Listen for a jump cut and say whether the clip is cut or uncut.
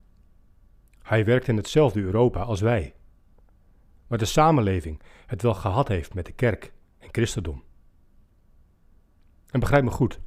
uncut